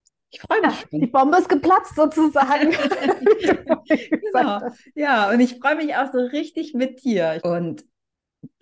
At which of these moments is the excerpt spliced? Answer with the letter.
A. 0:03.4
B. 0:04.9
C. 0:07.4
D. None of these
C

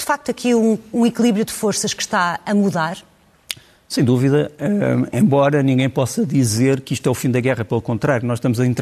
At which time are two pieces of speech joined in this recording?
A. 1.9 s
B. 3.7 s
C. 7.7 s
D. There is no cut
D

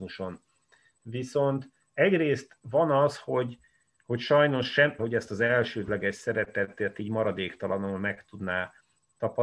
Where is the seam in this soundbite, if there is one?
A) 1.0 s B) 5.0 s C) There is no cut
B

